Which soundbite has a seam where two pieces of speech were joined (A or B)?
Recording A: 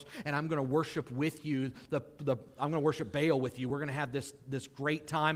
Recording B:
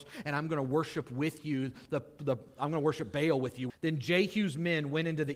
B